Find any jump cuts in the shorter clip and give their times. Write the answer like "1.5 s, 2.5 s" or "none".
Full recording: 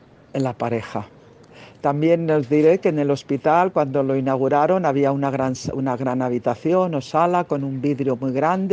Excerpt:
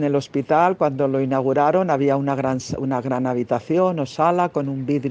none